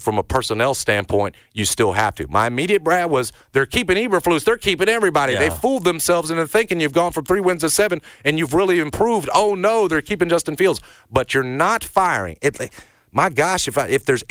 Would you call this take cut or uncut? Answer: uncut